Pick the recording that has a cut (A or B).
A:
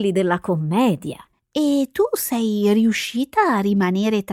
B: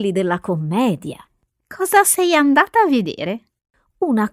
A